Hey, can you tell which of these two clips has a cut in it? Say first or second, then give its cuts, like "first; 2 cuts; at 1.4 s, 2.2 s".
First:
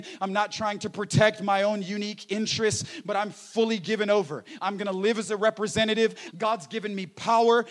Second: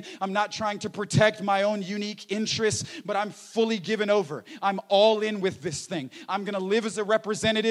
first; 2 cuts; at 4.6 s, 6.3 s